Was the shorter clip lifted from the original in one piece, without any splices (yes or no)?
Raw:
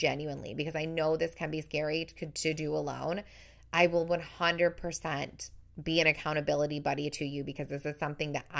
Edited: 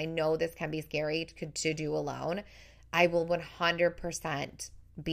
yes